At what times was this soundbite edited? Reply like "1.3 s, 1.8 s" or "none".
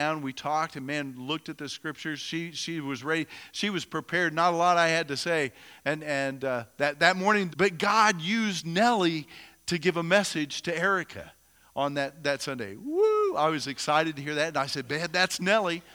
7.5 s